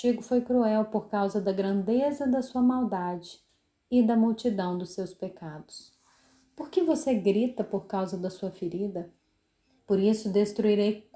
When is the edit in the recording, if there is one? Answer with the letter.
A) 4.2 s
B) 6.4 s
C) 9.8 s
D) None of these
C